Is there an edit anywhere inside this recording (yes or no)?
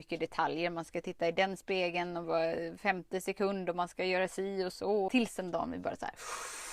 yes